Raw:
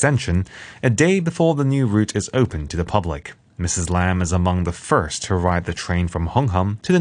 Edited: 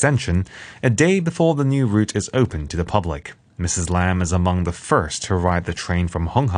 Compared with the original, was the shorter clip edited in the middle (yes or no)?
no